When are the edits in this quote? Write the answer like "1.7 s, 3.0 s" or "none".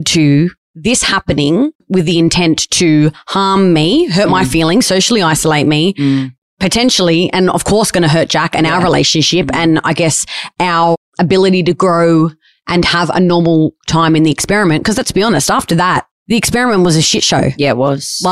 none